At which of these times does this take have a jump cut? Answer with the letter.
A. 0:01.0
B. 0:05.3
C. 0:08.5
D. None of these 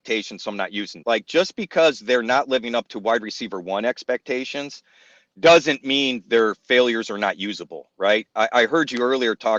A